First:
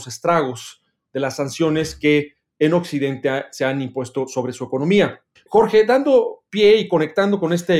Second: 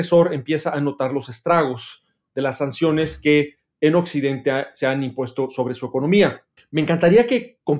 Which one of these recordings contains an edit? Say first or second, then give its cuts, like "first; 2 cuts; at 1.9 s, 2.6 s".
first; 1 cut; at 5.5 s